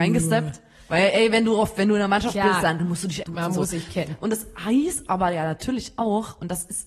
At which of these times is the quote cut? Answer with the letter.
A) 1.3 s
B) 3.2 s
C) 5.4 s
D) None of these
B